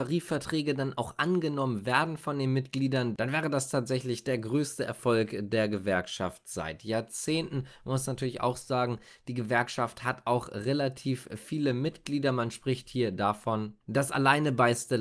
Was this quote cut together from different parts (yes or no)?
no